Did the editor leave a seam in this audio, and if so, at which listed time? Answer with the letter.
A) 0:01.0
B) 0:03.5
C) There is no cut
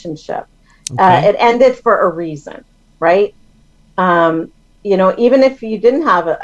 C